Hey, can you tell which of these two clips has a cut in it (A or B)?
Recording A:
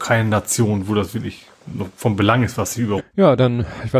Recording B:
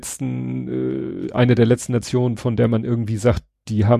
A